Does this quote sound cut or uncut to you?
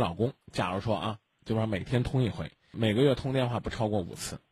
cut